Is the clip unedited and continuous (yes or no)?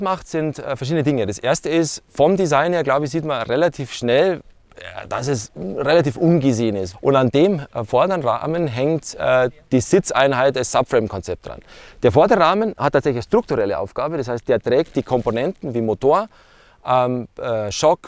no